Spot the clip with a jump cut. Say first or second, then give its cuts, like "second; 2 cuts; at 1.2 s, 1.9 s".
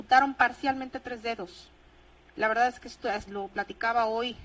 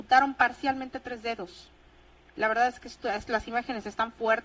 first; 1 cut; at 3.3 s